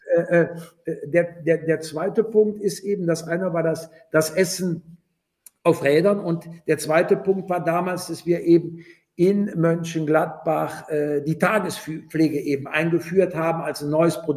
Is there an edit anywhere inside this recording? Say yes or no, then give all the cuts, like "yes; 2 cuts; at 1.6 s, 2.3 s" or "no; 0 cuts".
no; 0 cuts